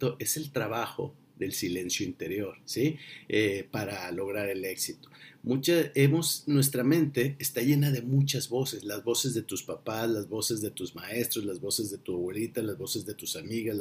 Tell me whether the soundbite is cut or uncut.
cut